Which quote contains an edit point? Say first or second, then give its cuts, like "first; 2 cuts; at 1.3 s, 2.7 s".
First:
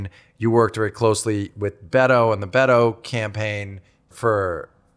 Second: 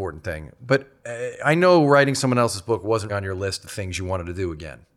second; 1 cut; at 3.1 s